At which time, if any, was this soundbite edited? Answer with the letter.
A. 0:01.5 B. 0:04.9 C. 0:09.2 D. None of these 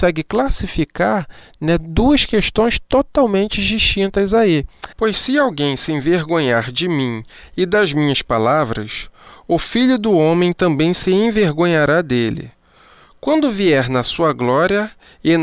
B